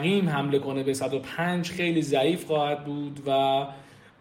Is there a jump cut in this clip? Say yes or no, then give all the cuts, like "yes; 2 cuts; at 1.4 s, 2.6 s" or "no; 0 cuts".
yes; 1 cut; at 1.7 s